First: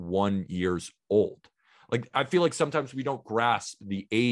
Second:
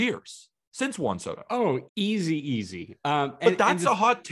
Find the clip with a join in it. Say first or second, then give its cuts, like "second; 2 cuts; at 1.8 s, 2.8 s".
second; 1 cut; at 1.9 s